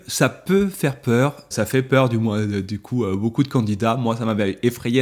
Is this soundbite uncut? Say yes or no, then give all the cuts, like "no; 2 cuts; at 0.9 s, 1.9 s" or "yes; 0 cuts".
no; 1 cut; at 1.5 s